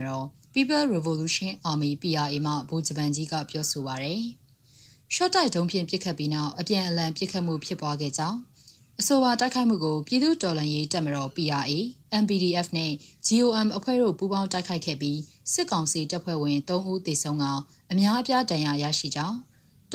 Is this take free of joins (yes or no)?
yes